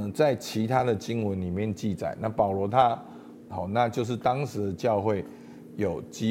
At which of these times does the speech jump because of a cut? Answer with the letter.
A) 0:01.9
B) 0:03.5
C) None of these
B